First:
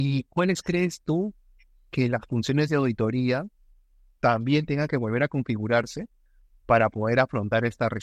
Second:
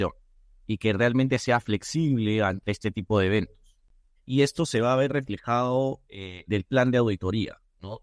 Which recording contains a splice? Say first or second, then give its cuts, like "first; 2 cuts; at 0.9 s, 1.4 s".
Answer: second; 2 cuts; at 4.2 s, 6.5 s